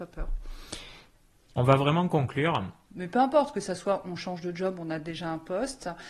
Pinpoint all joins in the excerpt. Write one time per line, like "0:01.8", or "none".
0:02.9